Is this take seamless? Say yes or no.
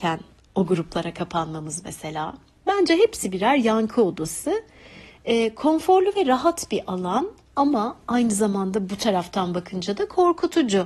yes